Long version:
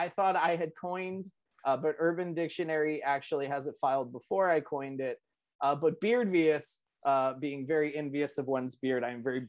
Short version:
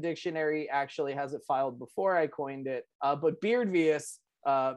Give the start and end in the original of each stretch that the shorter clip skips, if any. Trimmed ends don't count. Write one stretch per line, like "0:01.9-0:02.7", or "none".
0:05.3-0:05.5